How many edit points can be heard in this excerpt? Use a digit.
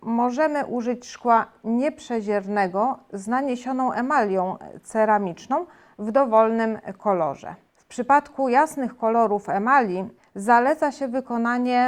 1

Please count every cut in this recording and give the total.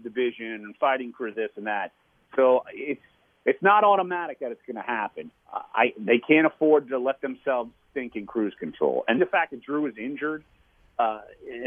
2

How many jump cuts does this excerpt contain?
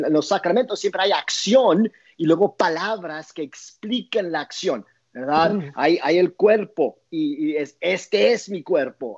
0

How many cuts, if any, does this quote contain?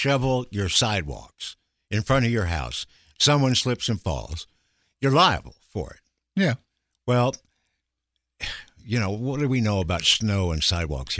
0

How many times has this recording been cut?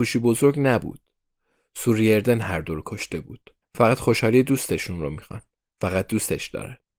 1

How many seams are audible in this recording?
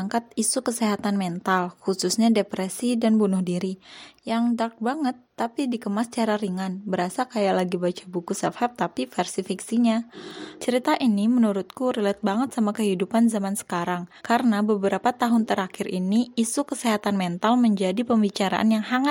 2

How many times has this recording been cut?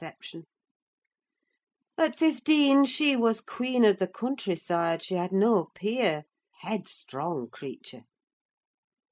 1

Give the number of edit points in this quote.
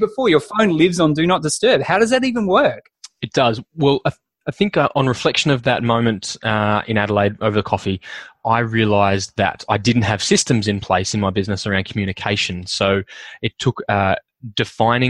0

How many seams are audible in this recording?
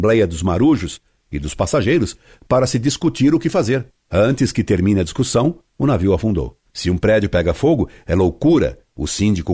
0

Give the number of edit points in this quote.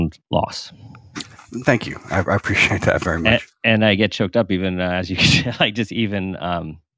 0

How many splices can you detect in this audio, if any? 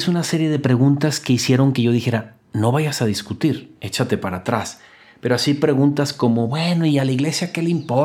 0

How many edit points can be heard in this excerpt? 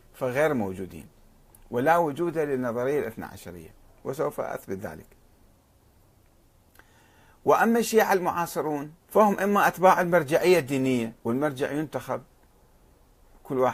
2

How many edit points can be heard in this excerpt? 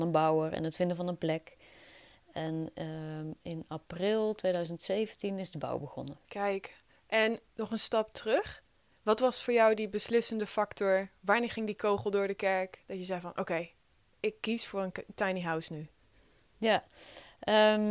1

